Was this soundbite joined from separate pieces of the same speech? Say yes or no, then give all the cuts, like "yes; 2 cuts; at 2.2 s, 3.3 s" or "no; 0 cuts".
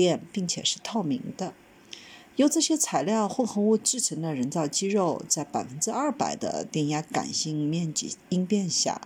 no; 0 cuts